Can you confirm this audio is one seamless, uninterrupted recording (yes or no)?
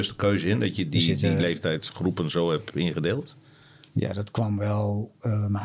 no